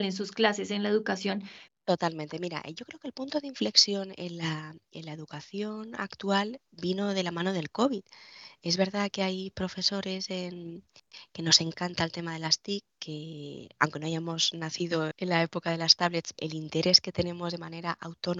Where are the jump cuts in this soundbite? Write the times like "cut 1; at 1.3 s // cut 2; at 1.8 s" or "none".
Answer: cut 1; at 1.7 s // cut 2; at 15.1 s // cut 3; at 16.3 s